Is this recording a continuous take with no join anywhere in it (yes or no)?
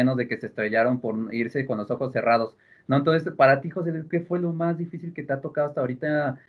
yes